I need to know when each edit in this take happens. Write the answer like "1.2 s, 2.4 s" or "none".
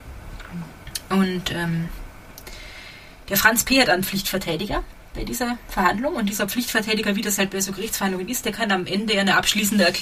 none